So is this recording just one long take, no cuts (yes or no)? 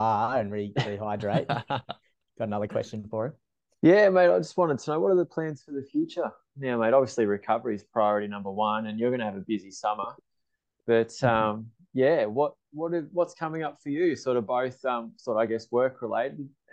yes